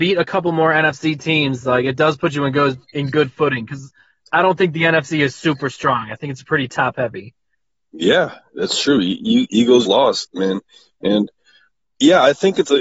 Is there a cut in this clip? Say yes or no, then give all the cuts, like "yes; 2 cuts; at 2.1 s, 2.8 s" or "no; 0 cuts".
yes; 3 cuts; at 7.8 s, 9.8 s, 11.8 s